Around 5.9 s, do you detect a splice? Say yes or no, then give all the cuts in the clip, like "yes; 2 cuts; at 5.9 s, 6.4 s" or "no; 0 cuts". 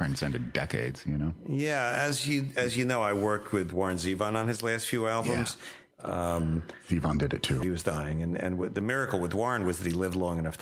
yes; 2 cuts; at 5.9 s, 7.6 s